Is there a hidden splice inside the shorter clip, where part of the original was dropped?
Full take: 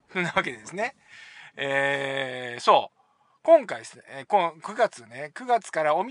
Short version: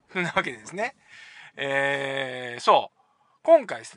no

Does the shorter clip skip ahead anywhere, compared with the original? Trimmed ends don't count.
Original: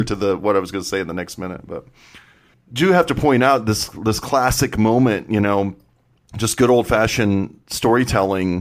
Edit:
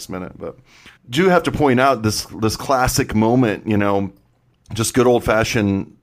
yes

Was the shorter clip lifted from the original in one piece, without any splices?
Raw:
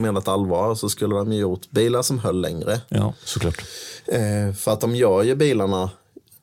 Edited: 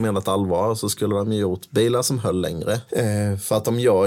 no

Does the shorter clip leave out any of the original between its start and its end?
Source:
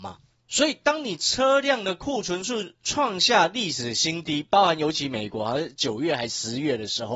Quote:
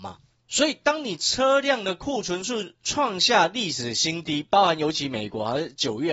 no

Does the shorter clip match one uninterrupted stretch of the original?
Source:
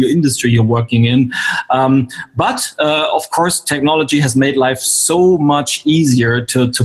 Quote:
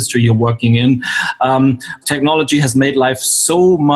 no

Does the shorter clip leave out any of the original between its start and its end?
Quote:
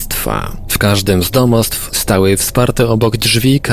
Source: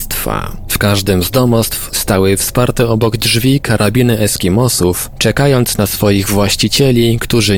no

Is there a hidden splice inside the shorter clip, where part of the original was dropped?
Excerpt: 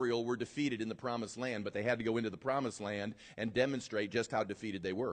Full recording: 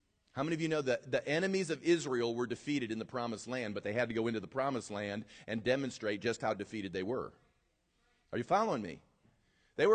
no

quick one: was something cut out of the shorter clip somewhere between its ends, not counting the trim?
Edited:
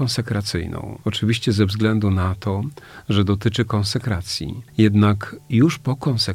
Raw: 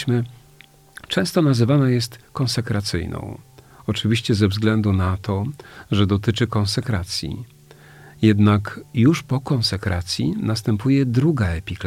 yes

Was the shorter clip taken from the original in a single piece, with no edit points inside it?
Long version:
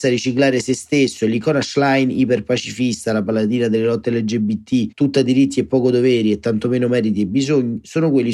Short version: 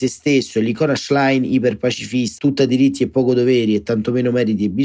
no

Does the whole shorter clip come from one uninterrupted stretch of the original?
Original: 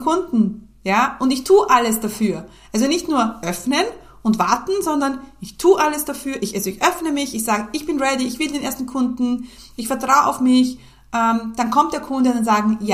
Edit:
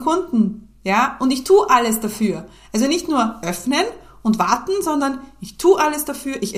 yes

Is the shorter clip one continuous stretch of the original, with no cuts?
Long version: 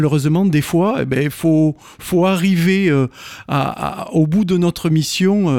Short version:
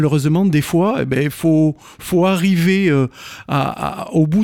yes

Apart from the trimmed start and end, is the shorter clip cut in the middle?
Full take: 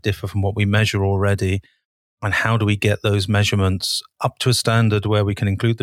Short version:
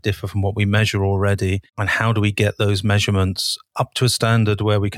yes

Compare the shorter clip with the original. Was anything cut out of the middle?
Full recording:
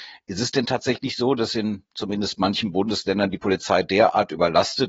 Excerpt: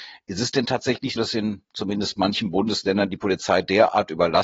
yes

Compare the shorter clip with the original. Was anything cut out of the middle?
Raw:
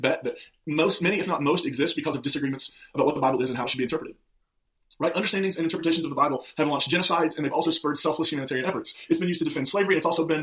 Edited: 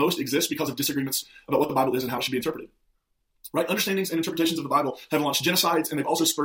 no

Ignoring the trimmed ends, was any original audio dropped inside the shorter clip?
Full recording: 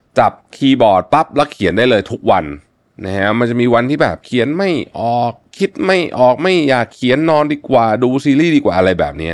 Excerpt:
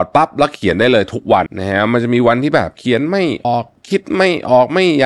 yes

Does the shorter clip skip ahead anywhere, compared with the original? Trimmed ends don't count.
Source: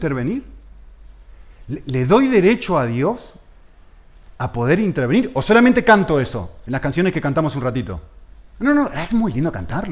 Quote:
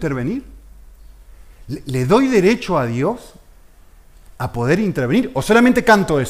no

